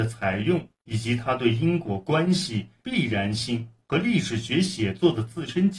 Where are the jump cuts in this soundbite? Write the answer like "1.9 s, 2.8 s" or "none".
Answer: 2.8 s